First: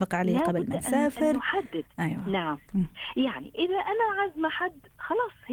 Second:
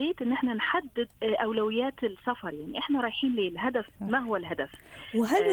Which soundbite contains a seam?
second; 1 cut; at 1.1 s

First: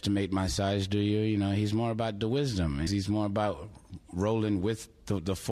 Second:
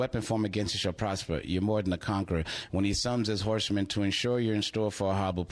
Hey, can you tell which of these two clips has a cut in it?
first; 1 cut; at 2.9 s

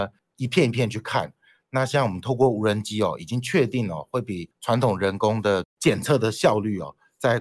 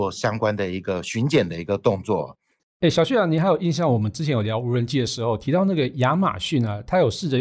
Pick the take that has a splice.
second; 1 cut; at 2.6 s

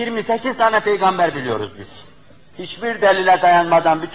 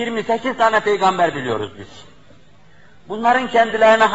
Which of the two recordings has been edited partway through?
first; 1 cut; at 2.5 s

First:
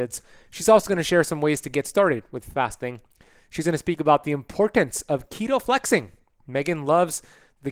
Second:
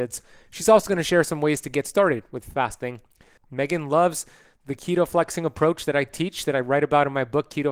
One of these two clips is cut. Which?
second; 1 cut; at 3.4 s

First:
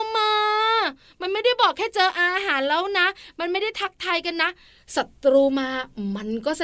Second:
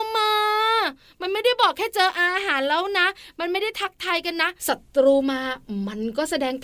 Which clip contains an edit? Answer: second; 1 cut; at 4.6 s

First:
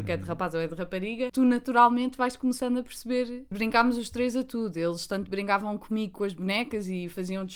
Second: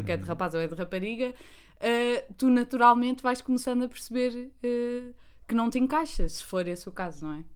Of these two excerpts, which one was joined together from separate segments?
first; 2 cuts; at 1.3 s, 3.5 s

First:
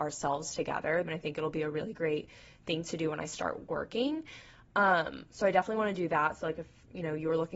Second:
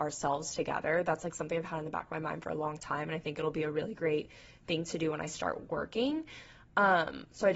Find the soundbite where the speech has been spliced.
first; 1 cut; at 1.0 s

